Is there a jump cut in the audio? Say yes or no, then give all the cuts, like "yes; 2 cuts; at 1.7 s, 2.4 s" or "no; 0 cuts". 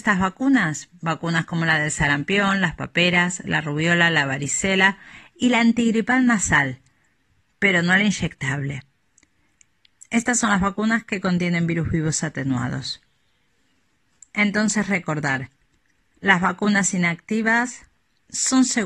no; 0 cuts